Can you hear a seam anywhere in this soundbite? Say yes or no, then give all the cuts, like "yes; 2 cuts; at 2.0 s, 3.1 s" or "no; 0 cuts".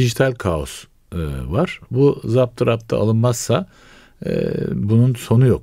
no; 0 cuts